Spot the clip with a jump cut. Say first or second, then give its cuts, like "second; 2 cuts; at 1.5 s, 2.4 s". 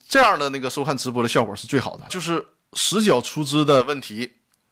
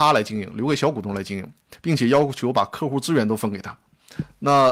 first; 1 cut; at 2.1 s